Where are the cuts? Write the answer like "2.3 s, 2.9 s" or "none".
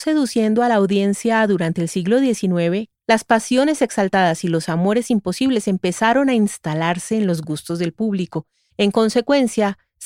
3.0 s